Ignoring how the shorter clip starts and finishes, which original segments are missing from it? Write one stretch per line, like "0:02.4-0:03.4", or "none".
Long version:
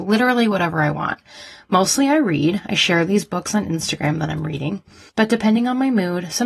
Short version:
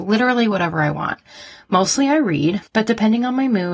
0:02.6-0:05.0